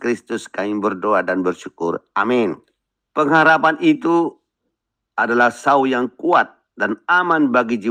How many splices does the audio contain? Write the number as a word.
one